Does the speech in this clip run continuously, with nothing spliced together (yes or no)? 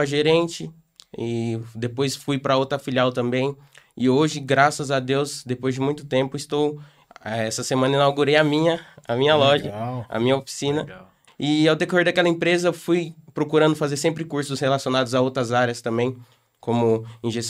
no